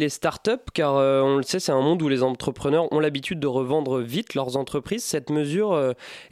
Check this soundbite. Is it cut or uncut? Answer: uncut